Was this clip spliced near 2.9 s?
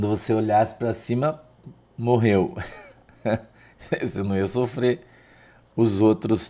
no; 0 cuts

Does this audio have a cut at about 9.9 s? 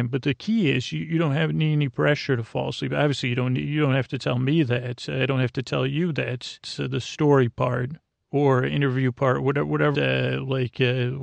yes; 2 cuts; at 6.6 s, 9.9 s

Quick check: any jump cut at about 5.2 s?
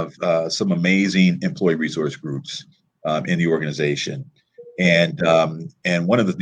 no; 0 cuts

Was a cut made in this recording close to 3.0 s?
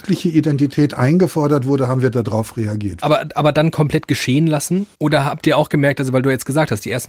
yes; 2 cuts; at 3.0 s, 4.9 s

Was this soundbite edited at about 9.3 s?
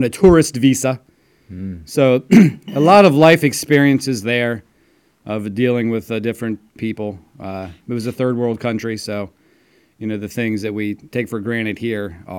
no; 1 cut; at 6.8 s

